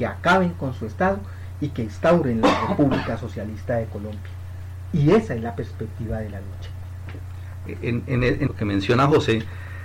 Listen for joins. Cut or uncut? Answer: cut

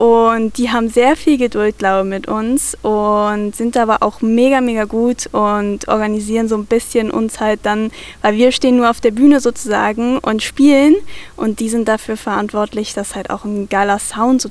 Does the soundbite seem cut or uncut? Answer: uncut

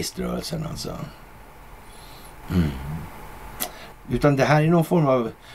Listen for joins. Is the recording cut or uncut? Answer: cut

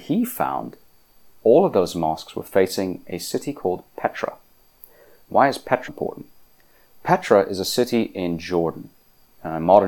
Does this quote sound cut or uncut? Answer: cut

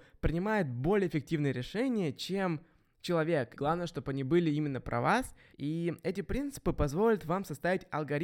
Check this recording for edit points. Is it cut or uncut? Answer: cut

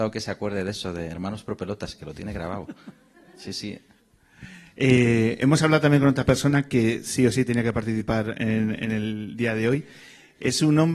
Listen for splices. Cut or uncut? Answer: uncut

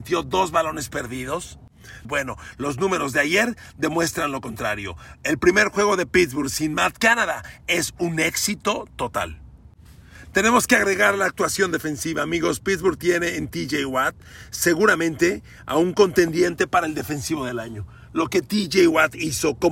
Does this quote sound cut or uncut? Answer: cut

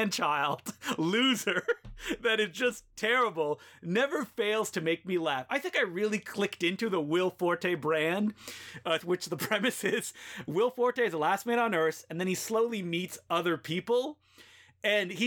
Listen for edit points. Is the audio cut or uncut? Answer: cut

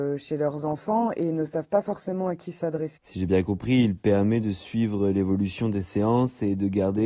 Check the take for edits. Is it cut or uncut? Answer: cut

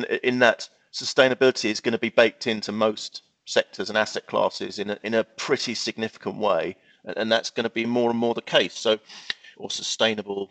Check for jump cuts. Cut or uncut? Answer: cut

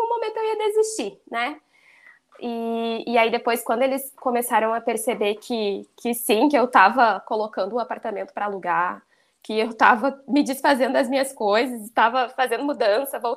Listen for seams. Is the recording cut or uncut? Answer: uncut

